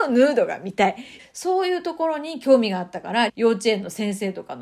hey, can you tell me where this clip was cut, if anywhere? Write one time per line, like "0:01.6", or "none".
0:01.2
0:03.3